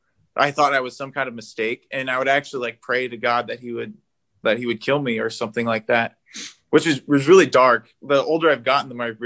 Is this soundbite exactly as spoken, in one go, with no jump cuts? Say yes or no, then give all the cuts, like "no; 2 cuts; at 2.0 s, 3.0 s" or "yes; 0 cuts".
yes; 0 cuts